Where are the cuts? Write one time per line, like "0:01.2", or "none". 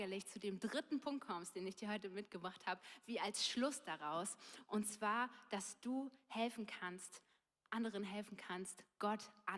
none